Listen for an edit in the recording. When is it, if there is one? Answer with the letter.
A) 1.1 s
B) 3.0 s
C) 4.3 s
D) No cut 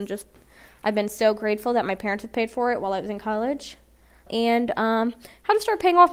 C